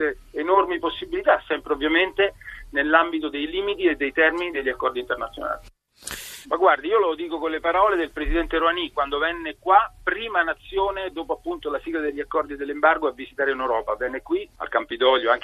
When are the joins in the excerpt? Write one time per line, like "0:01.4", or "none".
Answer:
0:06.4
0:11.1